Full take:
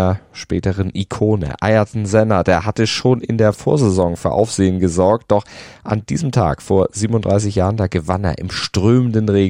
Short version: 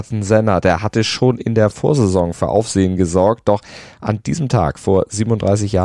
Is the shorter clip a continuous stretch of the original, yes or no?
yes